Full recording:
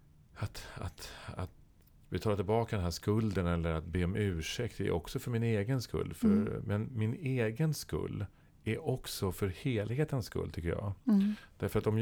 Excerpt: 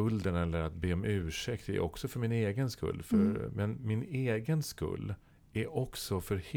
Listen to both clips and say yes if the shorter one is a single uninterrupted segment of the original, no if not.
yes